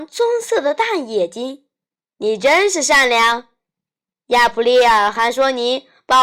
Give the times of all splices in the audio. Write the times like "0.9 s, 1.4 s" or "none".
2.1 s